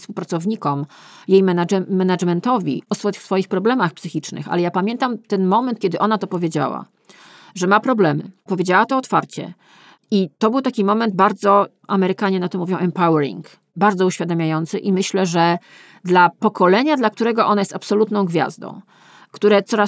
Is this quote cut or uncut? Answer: uncut